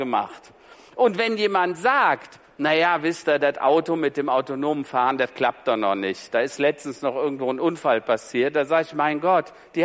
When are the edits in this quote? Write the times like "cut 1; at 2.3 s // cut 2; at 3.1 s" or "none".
none